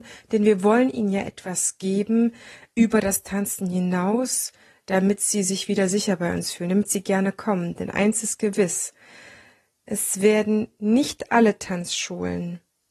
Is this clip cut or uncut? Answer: uncut